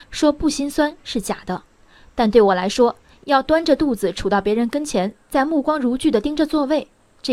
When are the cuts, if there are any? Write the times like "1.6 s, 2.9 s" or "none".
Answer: none